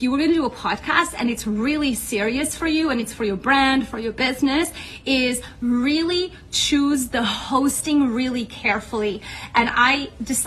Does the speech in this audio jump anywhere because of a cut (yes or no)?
no